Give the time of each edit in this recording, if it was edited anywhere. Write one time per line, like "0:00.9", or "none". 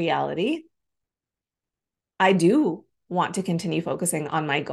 none

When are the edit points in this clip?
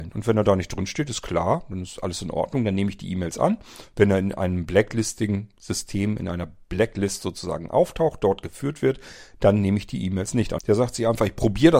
0:10.6

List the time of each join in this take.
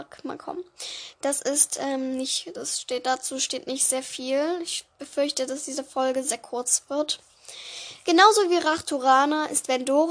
0:01.1

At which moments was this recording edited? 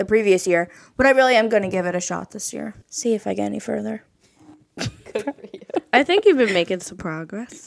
0:02.8

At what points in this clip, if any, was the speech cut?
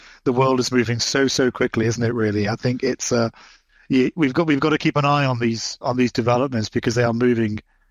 0:05.8

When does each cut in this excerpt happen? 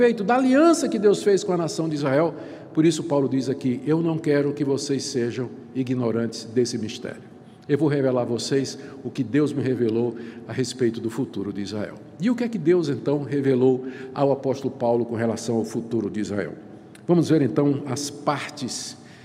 none

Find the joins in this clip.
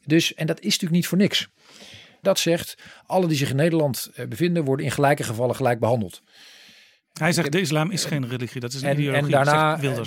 0:02.2

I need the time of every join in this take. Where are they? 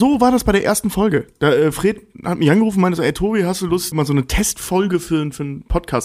0:03.9

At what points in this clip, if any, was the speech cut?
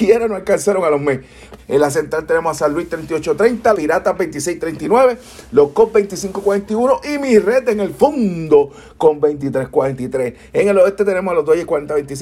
0:01.6
0:03.7

